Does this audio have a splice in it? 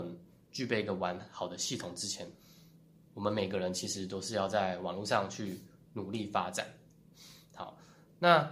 no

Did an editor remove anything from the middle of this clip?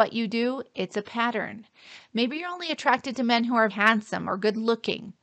yes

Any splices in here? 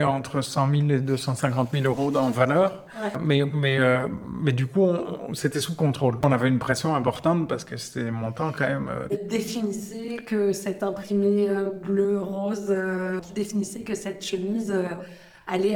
no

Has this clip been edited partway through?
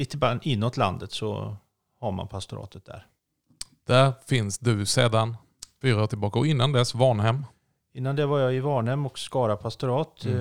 yes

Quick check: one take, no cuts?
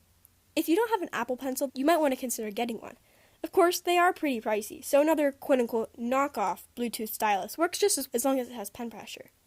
no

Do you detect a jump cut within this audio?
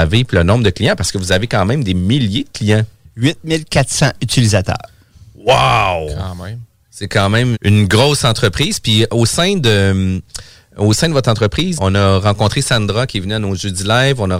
yes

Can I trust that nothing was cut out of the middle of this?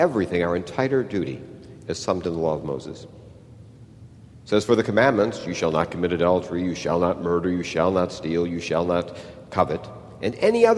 yes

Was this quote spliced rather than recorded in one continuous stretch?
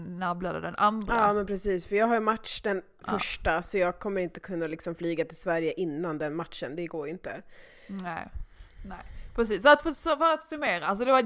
no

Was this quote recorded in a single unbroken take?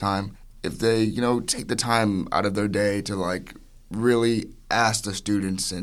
yes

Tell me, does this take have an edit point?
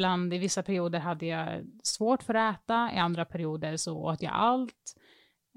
no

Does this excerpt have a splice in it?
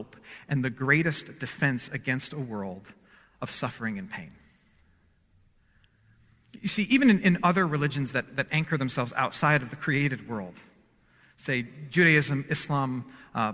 no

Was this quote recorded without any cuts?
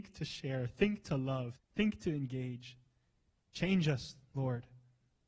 no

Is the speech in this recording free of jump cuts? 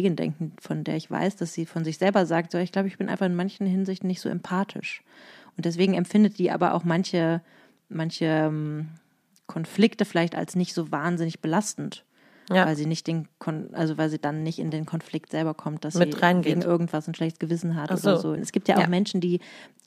no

